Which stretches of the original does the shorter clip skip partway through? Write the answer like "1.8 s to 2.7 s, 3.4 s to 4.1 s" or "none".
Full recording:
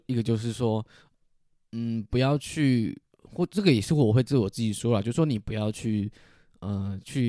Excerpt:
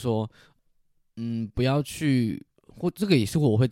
none